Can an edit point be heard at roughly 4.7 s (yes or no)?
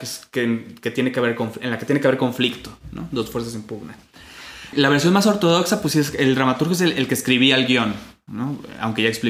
yes